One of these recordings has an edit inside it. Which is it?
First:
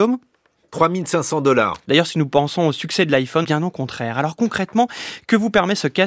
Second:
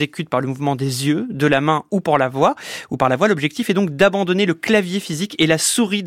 first; 2 cuts; at 1.9 s, 3.4 s

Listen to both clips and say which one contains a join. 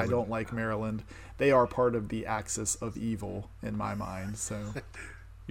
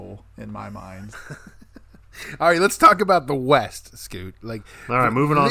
second; 1 cut; at 1.1 s

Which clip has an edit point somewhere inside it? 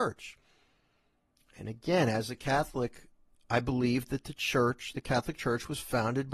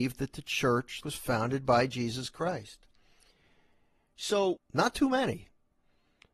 second; 2 cuts; at 1.0 s, 4.6 s

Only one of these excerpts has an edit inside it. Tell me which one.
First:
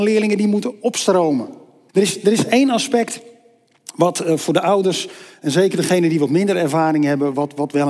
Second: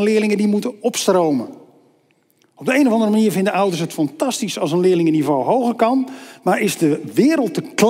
first; 1 cut; at 1.9 s

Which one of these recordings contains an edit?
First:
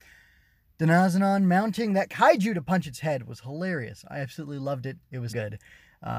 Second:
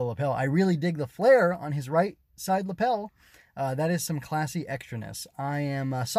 first; 1 cut; at 5.3 s

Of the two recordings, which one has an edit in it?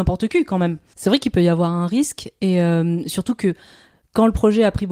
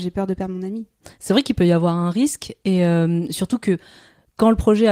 first; 1 cut; at 0.9 s

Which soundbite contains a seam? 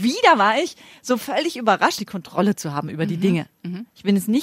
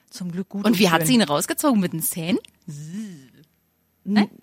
first; 1 cut; at 2.0 s

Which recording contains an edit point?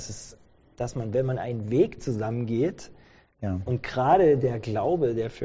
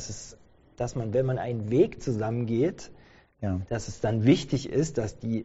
first; 1 cut; at 3.7 s

